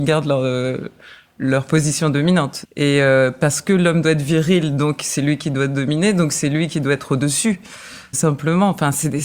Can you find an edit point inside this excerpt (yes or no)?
yes